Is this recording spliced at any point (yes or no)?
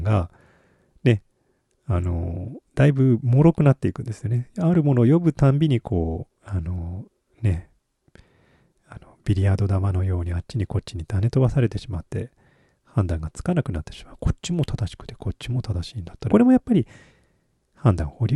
yes